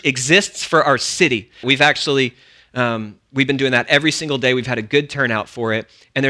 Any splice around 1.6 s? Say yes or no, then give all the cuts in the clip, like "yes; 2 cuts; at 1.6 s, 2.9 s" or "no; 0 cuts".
yes; 1 cut; at 1.6 s